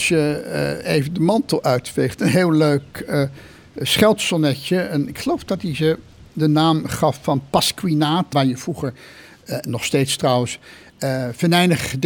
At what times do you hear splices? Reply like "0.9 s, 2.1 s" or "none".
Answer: 8.3 s